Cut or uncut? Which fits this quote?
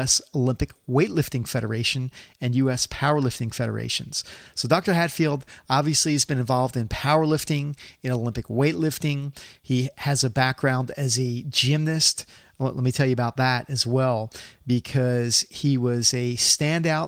uncut